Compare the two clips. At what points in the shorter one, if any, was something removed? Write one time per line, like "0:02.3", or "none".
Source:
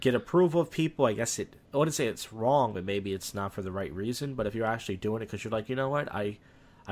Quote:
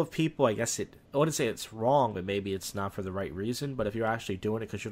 none